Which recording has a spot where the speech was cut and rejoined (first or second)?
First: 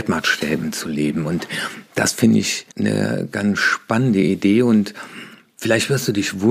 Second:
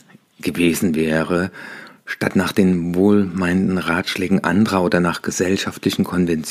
first